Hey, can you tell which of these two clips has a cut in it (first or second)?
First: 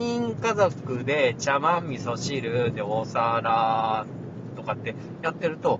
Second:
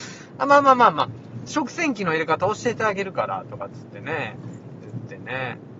first